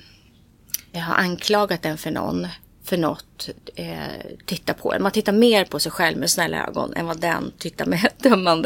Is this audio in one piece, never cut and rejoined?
no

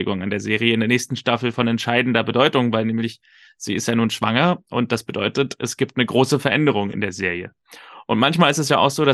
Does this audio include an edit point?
no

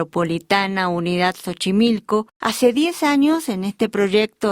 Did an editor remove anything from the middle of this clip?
yes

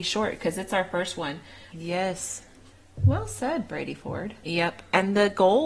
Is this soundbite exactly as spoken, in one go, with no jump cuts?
no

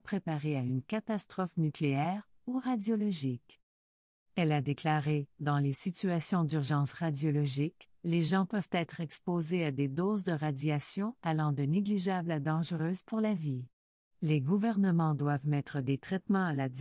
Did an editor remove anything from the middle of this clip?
no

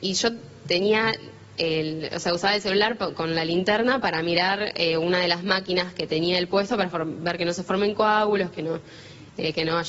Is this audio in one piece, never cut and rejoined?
yes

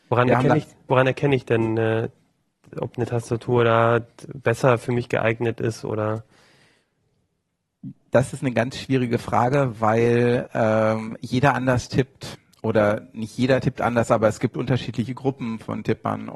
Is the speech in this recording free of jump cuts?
yes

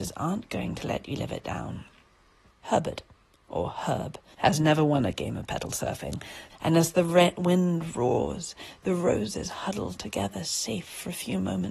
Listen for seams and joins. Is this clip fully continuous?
no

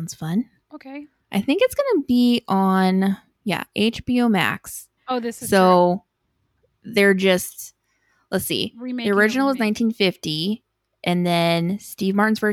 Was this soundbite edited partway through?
yes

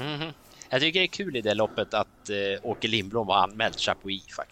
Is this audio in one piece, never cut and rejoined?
yes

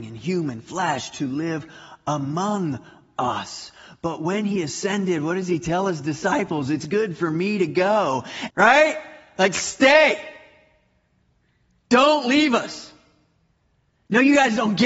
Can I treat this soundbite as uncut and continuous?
no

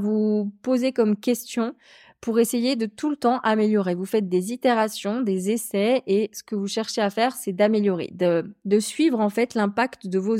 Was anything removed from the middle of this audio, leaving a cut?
no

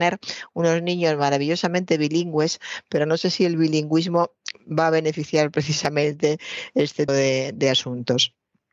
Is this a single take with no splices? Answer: no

